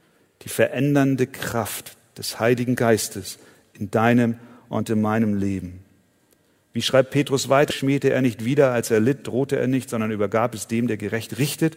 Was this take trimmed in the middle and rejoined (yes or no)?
yes